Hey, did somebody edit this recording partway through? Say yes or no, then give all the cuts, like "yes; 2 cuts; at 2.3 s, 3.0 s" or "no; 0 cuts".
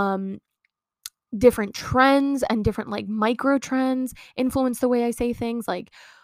no; 0 cuts